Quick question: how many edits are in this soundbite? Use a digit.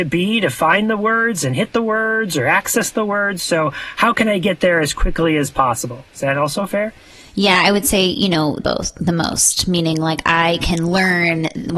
1